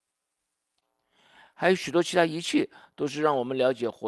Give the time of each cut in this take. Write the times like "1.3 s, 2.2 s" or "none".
none